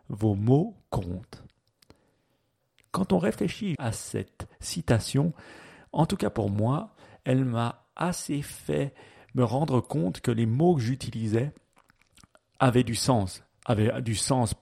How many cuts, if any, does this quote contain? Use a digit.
1